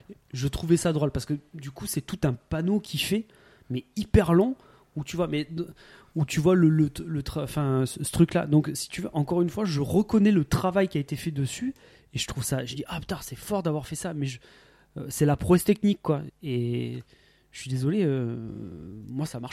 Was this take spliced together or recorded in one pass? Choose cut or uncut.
cut